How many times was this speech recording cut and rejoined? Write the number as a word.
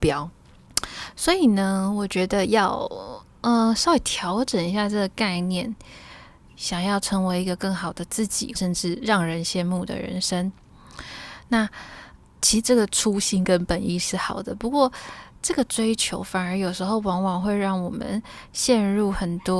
two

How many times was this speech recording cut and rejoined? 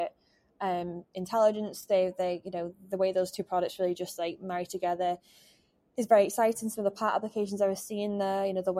zero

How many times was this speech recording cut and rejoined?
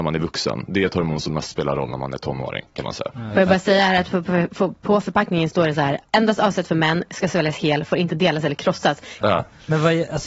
one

